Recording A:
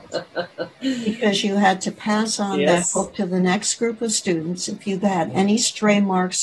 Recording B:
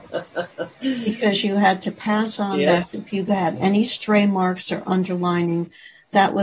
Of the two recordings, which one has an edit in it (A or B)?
B